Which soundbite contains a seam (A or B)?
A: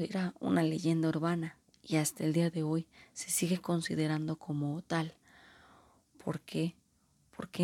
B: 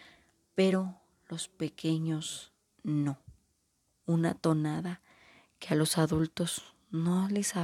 B